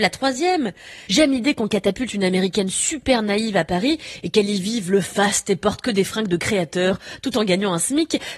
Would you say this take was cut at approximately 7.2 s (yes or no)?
no